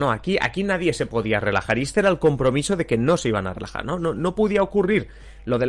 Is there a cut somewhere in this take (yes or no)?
no